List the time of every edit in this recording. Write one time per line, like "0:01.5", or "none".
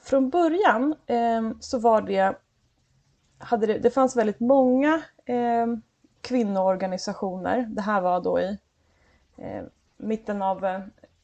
none